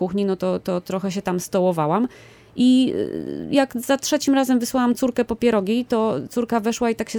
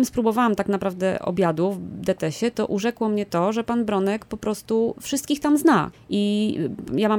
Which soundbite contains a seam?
second; 1 cut; at 5.9 s

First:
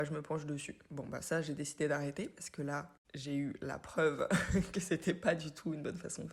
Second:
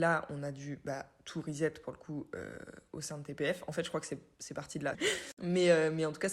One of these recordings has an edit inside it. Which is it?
second; 1 cut; at 4.9 s

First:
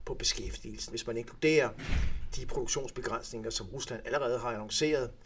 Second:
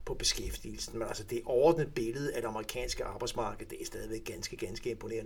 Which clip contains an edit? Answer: first; 1 cut; at 0.9 s

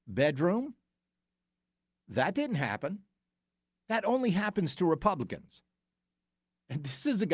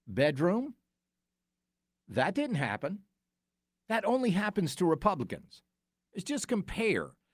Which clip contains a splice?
second; 1 cut; at 6.1 s

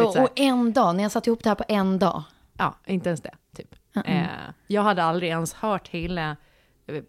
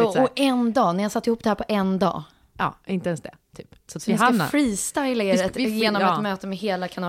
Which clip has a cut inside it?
second; 1 cut; at 3.9 s

